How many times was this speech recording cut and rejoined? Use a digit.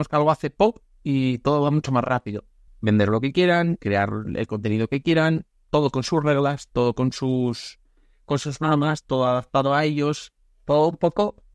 1